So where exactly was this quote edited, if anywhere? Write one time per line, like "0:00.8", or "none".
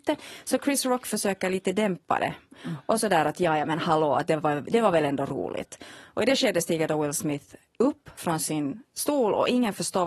none